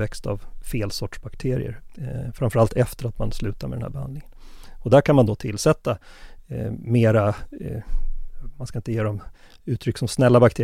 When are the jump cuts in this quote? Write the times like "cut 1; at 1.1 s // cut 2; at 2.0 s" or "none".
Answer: none